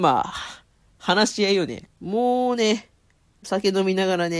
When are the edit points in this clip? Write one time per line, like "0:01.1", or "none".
0:01.9